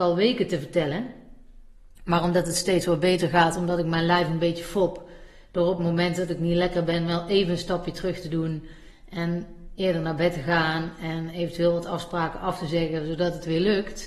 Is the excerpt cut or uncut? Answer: uncut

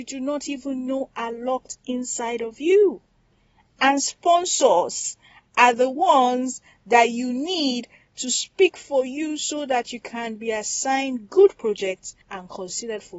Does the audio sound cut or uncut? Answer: uncut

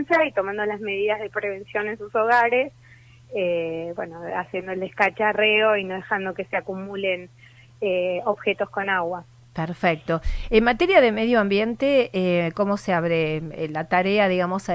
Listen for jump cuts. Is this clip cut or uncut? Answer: uncut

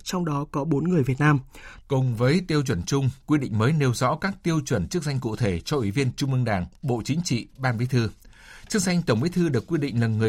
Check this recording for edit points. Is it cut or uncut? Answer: cut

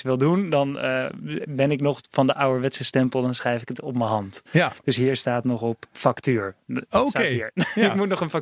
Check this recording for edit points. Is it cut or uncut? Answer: uncut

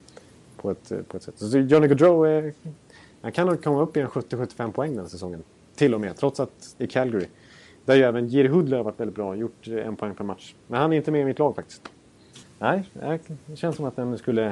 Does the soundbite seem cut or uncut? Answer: cut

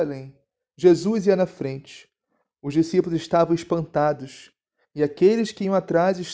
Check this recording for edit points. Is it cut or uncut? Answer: uncut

